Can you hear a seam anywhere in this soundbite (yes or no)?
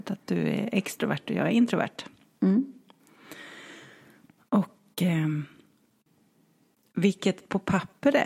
no